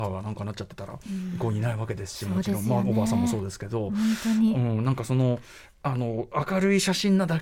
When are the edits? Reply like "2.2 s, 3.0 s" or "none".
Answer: none